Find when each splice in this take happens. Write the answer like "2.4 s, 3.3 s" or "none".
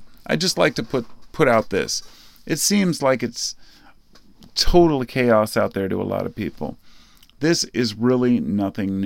none